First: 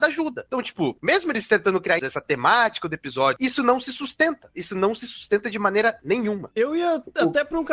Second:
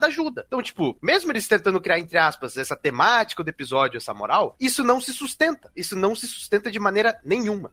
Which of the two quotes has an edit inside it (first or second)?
first